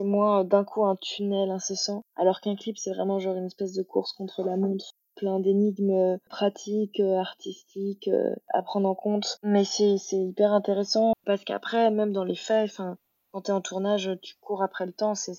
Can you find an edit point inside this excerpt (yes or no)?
yes